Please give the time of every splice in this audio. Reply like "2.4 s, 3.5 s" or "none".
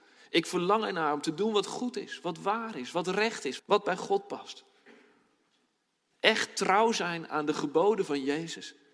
3.6 s